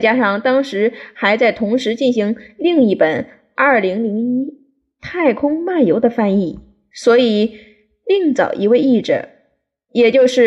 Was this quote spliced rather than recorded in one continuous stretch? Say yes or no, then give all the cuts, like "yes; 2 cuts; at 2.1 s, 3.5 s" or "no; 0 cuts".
no; 0 cuts